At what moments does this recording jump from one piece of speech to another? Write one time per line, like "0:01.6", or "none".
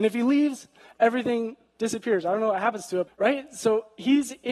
0:03.1